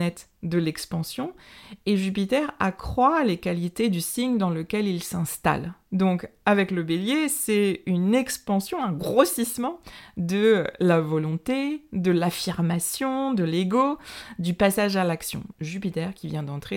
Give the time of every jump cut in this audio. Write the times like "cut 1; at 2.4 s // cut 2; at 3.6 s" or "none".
cut 1; at 15.5 s